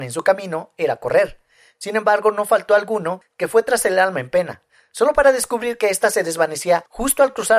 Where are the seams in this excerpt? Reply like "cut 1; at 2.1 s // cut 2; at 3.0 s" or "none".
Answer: none